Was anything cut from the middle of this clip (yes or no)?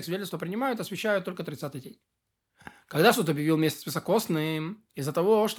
no